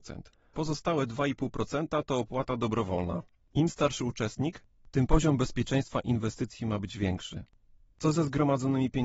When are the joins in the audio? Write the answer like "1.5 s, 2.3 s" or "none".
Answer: 3.4 s